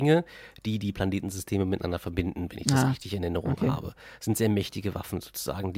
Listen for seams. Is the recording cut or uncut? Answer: uncut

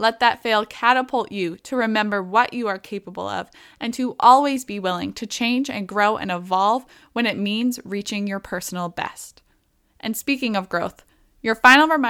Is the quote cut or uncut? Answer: uncut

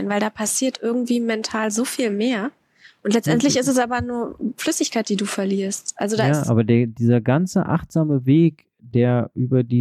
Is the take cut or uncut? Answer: uncut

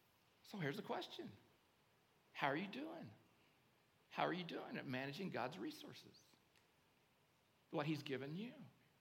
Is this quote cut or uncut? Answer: uncut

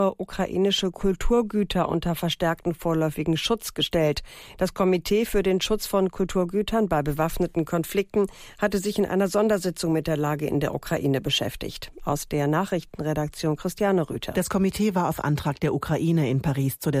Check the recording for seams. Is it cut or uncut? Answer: uncut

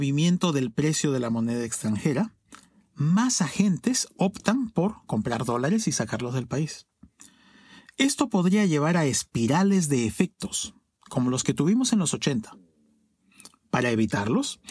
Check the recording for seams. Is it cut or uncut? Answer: uncut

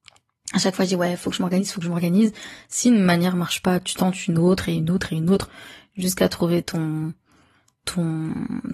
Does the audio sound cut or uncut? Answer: uncut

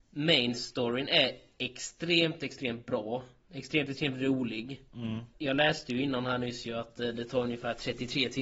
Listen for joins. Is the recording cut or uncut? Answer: cut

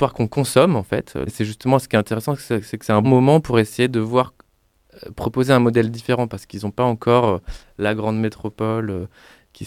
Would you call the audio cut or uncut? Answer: cut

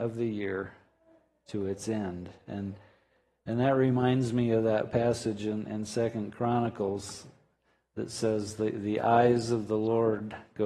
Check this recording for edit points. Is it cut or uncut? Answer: uncut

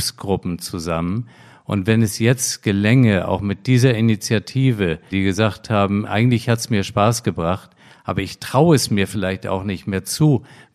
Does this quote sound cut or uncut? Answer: cut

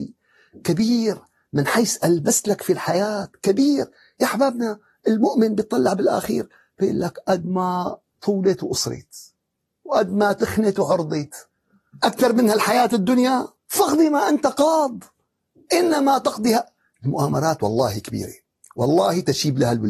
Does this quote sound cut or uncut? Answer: cut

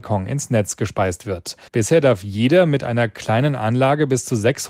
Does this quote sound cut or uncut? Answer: cut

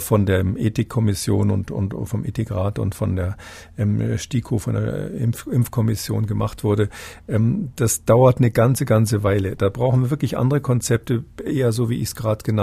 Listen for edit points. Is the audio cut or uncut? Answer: uncut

